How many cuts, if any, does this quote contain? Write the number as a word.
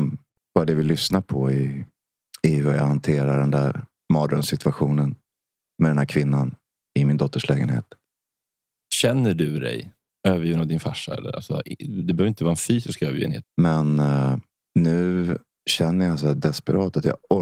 two